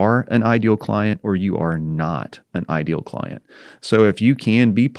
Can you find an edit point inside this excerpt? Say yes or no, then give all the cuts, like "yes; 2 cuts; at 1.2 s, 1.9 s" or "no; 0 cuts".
no; 0 cuts